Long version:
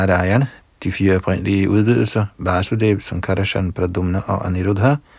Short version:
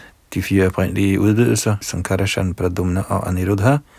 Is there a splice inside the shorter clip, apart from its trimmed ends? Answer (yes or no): yes